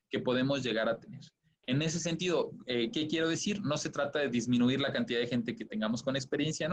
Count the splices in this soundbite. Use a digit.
0